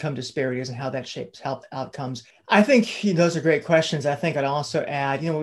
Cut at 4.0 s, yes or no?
no